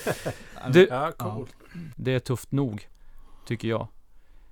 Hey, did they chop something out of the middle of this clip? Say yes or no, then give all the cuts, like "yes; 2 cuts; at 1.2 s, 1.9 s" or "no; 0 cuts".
yes; 1 cut; at 1.9 s